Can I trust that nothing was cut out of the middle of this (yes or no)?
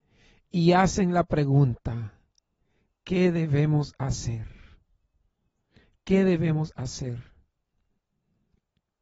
yes